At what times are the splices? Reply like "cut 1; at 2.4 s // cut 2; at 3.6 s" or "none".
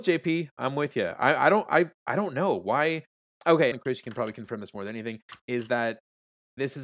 cut 1; at 3.7 s